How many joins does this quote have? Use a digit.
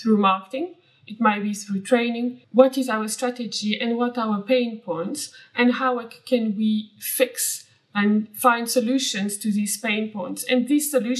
1